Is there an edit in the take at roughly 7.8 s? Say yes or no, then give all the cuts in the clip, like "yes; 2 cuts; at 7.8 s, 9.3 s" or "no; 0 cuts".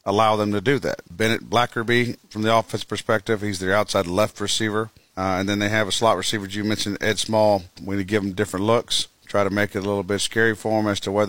yes; 2 cuts; at 1.0 s, 7.8 s